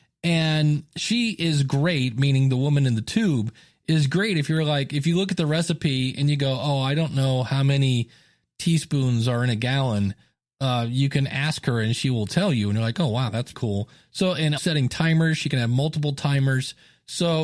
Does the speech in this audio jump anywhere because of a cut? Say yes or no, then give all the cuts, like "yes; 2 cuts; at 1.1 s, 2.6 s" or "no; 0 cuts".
yes; 2 cuts; at 13.5 s, 14.6 s